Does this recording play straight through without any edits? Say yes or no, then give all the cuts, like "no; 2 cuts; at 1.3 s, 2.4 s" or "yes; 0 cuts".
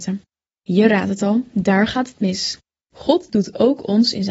no; 1 cut; at 2.8 s